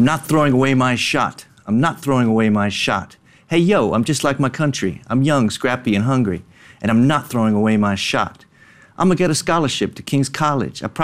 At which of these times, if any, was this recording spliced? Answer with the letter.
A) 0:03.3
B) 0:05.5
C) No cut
C